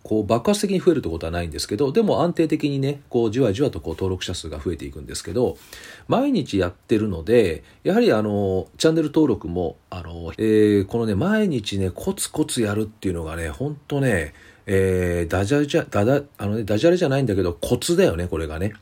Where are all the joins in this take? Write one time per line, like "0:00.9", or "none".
0:10.3